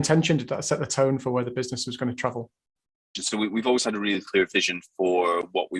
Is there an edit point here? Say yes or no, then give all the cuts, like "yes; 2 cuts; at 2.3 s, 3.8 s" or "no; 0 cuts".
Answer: no; 0 cuts